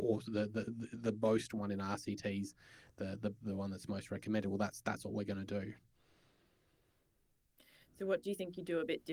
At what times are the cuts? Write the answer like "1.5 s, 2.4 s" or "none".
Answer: 3.4 s